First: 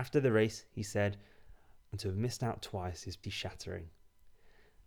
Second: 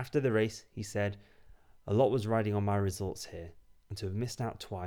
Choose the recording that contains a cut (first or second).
first